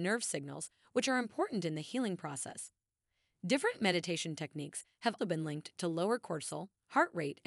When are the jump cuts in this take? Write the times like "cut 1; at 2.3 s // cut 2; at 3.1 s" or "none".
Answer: cut 1; at 5.2 s

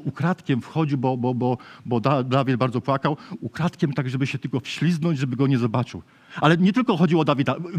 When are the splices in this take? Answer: none

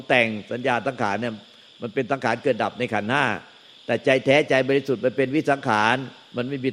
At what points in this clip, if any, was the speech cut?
none

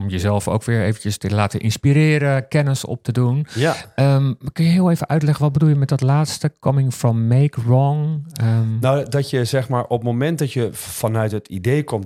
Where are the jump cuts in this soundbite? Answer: none

